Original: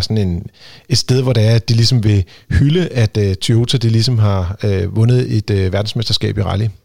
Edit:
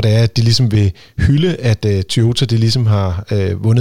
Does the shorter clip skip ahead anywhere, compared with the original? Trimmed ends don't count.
no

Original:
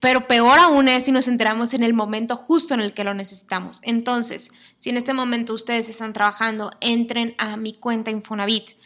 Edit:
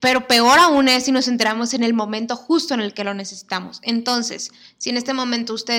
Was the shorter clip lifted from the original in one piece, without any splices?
yes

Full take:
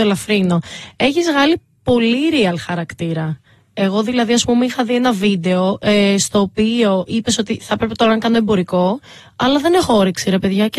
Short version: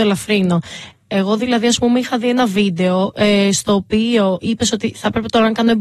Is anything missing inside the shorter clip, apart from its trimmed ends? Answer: yes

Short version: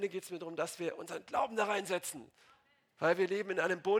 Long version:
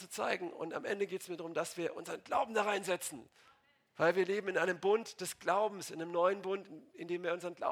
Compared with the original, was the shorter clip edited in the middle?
no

